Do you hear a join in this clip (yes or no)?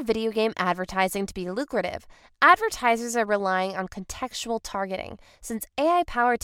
no